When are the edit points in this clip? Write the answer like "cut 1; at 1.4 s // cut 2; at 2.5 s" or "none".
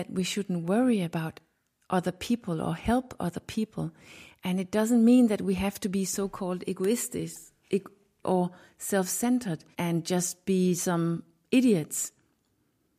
cut 1; at 8.2 s // cut 2; at 9.7 s